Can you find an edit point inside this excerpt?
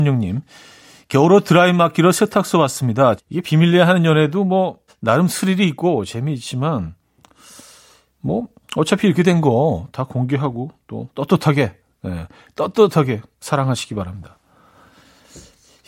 yes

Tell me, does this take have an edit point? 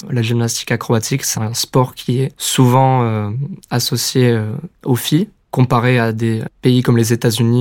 yes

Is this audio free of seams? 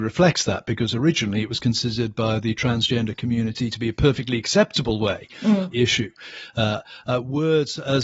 no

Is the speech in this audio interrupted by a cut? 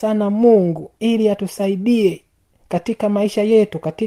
no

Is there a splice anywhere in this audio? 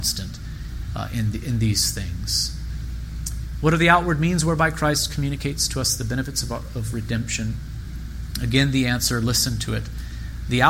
no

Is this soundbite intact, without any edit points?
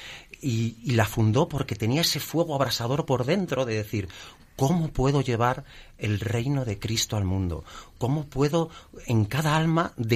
no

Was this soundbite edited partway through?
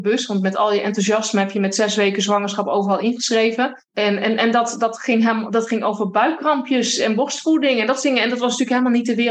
yes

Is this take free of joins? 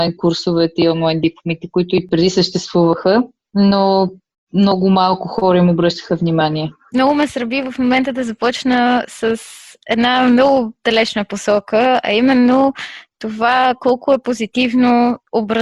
no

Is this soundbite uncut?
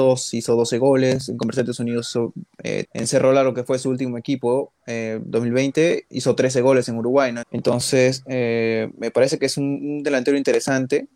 no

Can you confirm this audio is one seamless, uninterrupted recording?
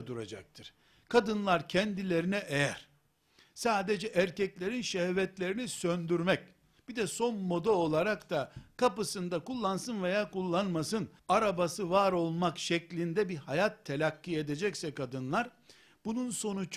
no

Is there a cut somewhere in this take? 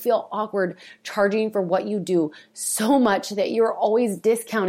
no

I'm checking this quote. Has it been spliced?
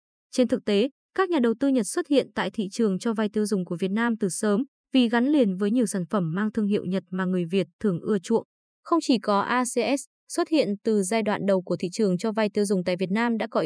no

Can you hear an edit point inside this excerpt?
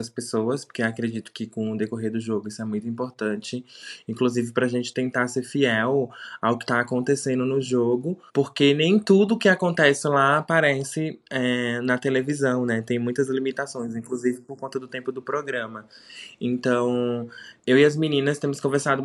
yes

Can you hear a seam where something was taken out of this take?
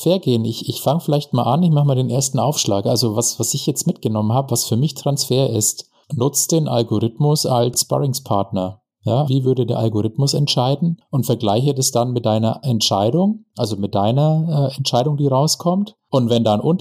yes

